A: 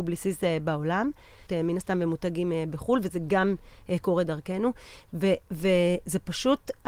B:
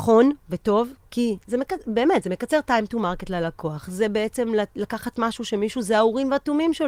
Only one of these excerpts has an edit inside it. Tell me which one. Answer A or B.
A